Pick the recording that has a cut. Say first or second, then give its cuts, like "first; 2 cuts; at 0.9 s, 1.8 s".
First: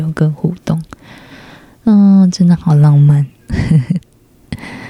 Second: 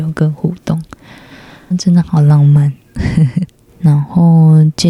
second; 2 cuts; at 1.7 s, 3.7 s